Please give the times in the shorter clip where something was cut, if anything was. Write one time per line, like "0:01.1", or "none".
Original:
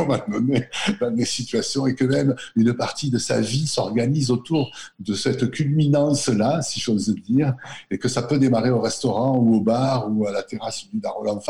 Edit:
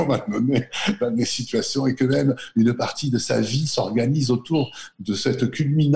none